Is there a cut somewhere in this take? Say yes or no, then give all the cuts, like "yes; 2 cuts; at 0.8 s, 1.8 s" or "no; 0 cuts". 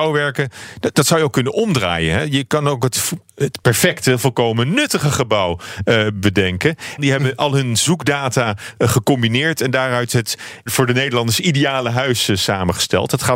yes; 2 cuts; at 7.0 s, 10.7 s